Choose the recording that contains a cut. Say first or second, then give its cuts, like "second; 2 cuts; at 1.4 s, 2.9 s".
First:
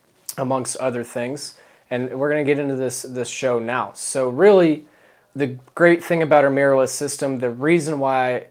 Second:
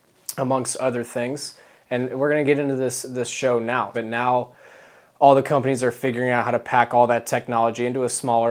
second; 1 cut; at 3.9 s